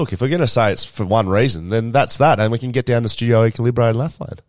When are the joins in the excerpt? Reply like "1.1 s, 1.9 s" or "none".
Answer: none